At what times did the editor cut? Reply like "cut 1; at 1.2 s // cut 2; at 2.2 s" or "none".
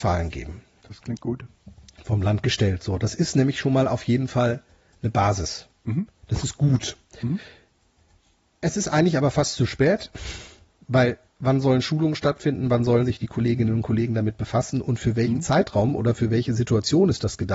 none